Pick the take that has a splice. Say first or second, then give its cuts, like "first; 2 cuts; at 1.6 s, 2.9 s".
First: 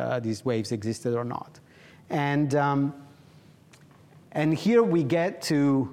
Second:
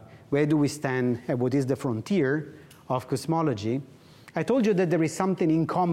first; 1 cut; at 1.9 s